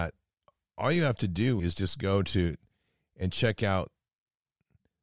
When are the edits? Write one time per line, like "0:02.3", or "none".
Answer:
0:01.6